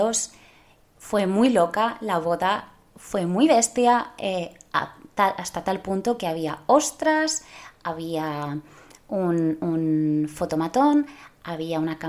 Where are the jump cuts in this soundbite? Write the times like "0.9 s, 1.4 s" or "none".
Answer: none